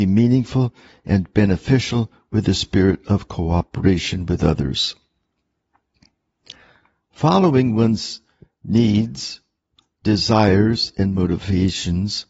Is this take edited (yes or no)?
no